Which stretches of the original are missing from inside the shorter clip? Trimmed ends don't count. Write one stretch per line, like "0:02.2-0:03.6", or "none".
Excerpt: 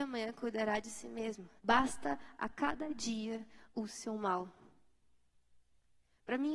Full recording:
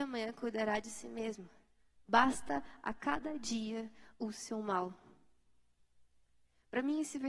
0:01.6-0:02.0